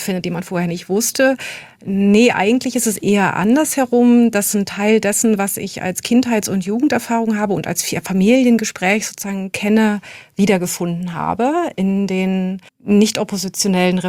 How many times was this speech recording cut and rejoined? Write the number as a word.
one